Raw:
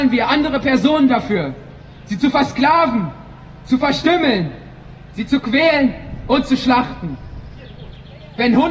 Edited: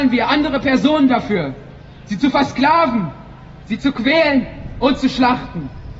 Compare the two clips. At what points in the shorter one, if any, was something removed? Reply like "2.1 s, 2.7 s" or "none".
3.6 s